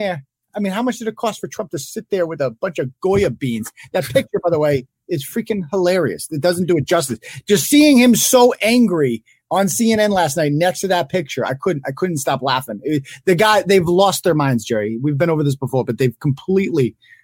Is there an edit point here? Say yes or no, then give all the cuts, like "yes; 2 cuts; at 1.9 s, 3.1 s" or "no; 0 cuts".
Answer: no; 0 cuts